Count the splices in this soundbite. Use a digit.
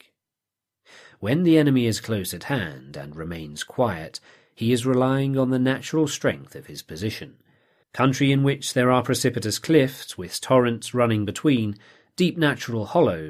1